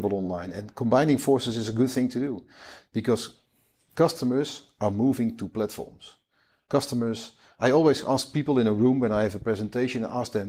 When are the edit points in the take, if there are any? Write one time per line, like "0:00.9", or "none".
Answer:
none